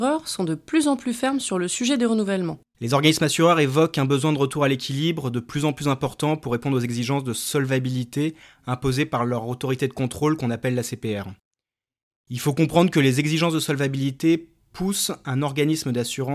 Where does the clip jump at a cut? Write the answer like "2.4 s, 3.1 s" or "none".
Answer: 2.7 s